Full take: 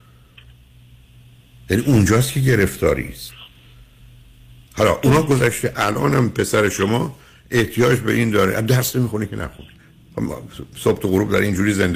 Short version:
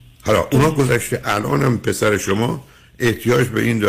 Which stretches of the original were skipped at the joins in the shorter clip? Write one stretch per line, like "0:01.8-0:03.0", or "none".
none

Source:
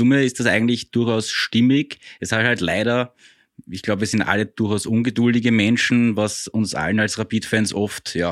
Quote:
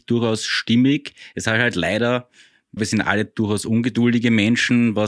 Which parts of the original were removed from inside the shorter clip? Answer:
0:03.6-0:04.0

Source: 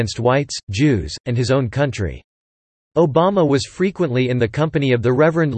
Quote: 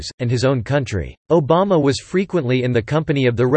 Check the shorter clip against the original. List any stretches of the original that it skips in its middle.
0:02.3-0:02.9

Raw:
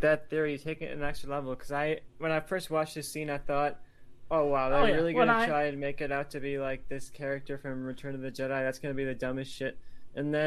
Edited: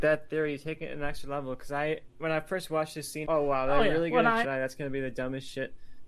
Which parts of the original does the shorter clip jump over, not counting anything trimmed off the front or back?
0:03.2-0:04.3
0:05.5-0:08.5

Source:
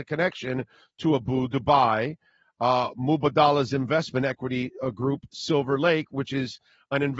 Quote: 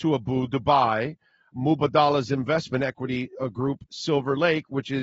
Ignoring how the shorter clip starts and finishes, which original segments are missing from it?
0:02.5-0:02.9

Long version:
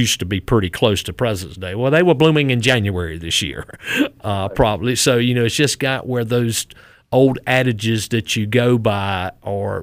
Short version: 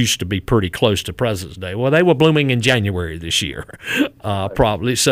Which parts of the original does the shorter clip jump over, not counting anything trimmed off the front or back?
none

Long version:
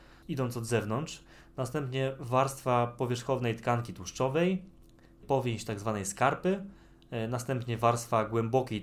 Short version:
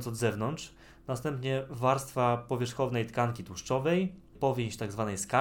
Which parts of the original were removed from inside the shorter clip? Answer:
0:04.8-0:05.2

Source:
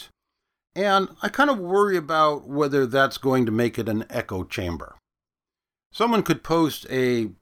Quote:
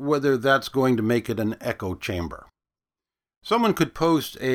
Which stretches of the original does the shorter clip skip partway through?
none

